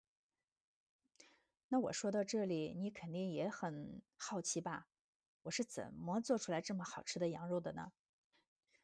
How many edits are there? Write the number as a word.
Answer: zero